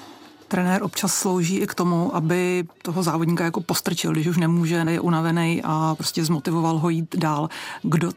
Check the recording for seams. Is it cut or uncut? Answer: cut